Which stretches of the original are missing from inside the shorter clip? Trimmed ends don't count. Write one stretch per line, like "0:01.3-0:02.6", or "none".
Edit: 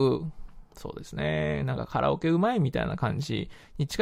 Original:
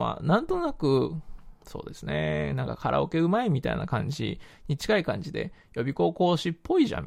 none